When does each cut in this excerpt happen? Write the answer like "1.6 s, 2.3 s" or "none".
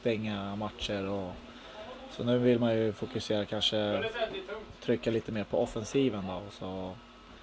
none